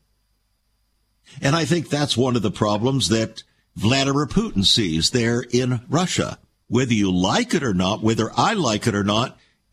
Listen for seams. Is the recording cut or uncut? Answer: cut